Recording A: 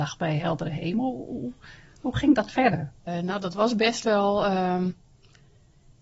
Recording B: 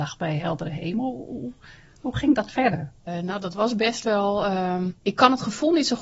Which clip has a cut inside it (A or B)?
B